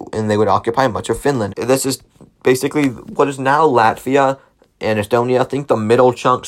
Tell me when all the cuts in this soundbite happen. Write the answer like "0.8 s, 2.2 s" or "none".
1.5 s